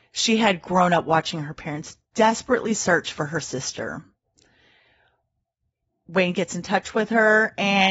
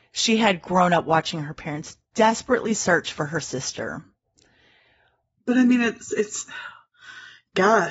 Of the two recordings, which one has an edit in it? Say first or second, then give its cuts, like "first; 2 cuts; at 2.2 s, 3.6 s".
second; 1 cut; at 5.4 s